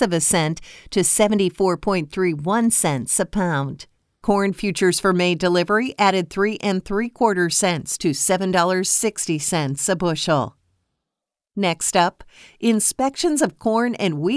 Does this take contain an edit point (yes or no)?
no